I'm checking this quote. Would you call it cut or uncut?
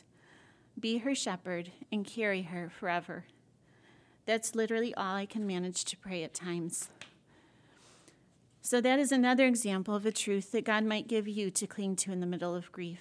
uncut